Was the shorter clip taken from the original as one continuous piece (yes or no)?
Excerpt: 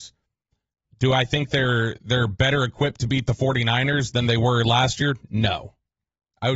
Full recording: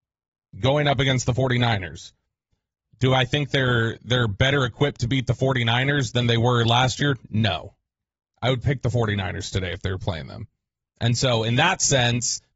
yes